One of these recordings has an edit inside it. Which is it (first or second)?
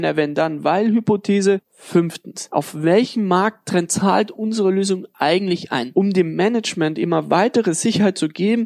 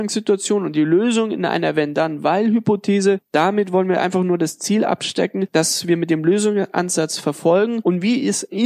first